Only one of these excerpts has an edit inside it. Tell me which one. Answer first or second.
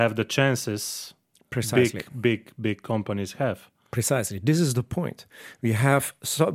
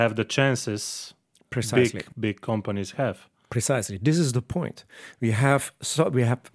second